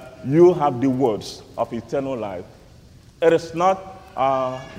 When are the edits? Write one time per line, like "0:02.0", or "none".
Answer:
none